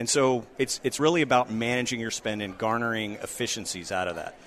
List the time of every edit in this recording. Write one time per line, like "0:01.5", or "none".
none